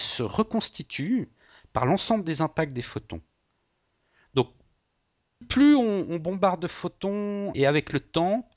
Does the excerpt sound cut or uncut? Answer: cut